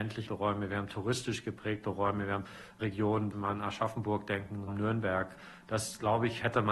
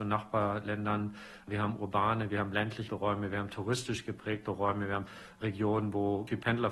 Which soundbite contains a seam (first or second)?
first